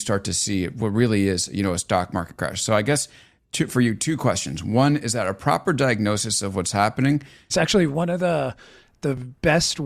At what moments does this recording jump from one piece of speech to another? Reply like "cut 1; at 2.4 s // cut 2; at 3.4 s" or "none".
cut 1; at 7.5 s